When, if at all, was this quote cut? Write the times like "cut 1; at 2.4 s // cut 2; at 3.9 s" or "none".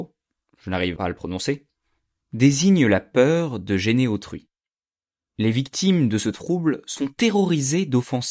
cut 1; at 1.0 s

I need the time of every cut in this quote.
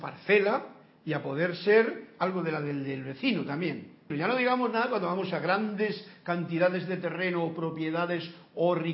cut 1; at 4.1 s

